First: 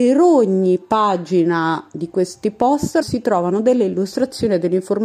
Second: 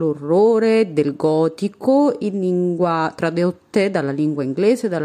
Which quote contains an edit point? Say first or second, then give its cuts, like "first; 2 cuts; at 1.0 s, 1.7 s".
first; 1 cut; at 3.0 s